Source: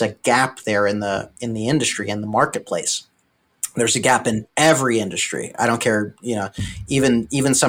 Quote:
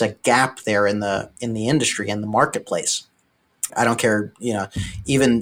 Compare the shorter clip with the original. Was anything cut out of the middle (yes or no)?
yes